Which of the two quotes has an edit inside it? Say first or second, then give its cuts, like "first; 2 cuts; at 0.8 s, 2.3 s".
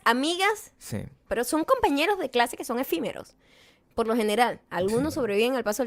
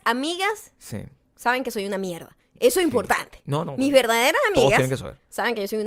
first; 1 cut; at 1.3 s